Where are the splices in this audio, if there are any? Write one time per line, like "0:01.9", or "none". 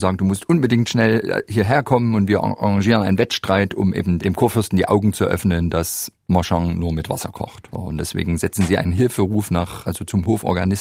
0:04.2
0:07.7
0:09.8